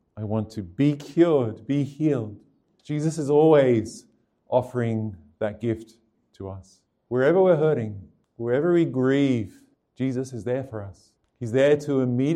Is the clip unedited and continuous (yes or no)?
no